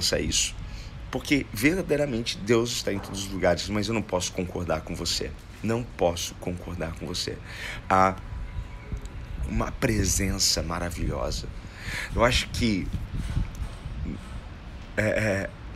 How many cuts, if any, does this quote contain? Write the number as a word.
three